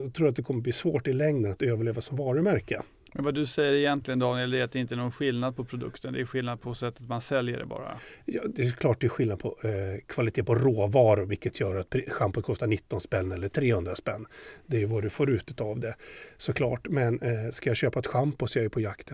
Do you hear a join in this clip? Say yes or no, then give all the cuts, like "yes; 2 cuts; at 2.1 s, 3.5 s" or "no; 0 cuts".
no; 0 cuts